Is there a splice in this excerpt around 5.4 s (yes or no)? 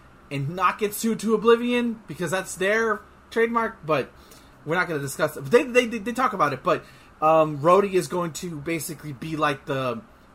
no